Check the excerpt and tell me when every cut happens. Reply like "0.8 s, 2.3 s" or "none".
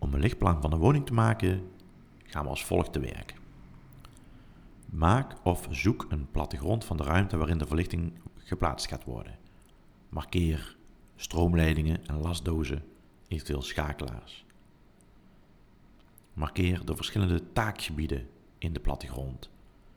none

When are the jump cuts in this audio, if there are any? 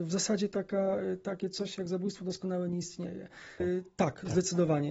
3.6 s

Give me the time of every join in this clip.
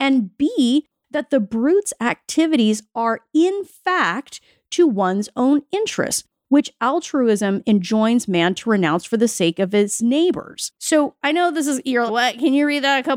10.7 s, 12.1 s

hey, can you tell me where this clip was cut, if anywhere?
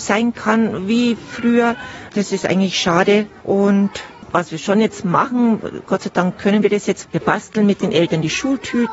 2.1 s, 7.0 s

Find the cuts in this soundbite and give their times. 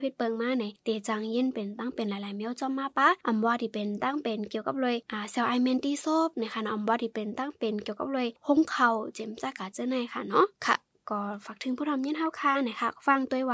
10.5 s

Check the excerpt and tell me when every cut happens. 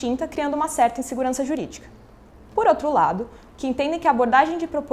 3.5 s

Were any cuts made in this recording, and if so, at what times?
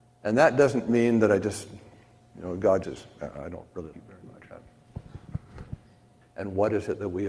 2.8 s, 3.9 s, 6.2 s

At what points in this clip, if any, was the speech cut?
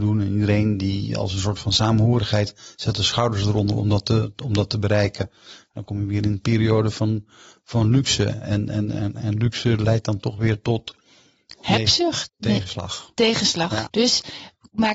8.9 s, 12.3 s, 13.9 s

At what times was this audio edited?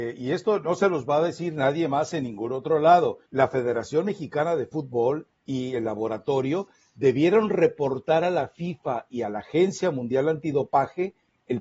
3.3 s

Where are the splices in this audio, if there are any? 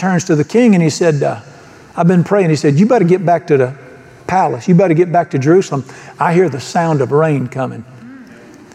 none

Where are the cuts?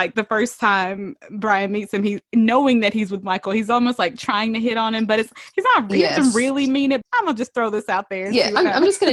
7.0 s

